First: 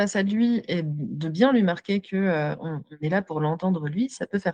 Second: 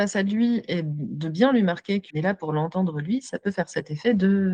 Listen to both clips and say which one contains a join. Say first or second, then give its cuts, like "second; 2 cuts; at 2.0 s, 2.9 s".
second; 1 cut; at 2.1 s